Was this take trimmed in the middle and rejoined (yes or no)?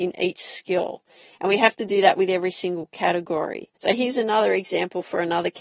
yes